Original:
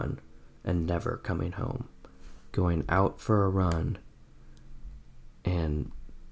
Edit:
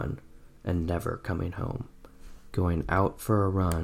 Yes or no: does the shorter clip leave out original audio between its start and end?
no